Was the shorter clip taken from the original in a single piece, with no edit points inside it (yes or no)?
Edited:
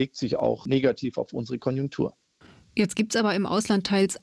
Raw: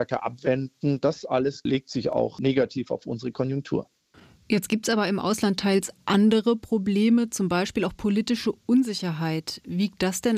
yes